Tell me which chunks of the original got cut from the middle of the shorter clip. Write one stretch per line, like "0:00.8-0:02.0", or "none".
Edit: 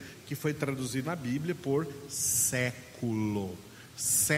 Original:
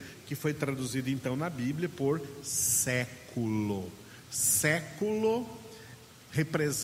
0:01.0-0:01.4